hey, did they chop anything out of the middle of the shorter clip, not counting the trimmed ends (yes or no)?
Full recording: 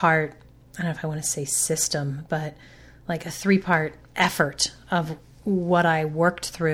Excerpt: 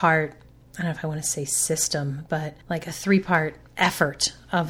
yes